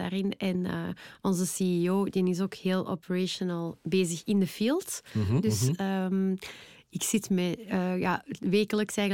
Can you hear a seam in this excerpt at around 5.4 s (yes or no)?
yes